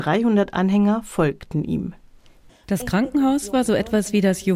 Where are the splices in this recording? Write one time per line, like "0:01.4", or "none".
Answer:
0:02.5